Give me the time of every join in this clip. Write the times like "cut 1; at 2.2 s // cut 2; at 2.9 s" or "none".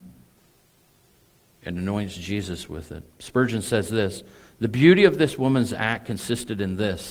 none